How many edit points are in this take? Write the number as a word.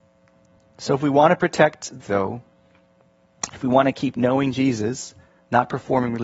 one